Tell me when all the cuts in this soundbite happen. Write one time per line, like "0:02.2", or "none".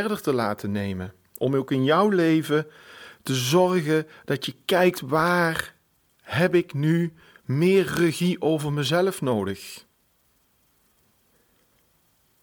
none